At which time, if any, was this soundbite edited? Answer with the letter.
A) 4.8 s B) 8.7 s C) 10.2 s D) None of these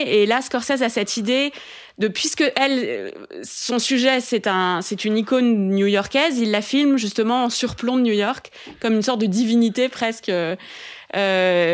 D